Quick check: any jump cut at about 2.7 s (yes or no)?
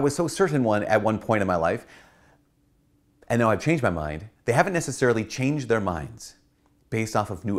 no